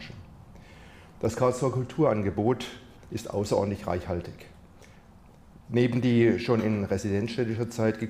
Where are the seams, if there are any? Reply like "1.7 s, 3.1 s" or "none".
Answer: none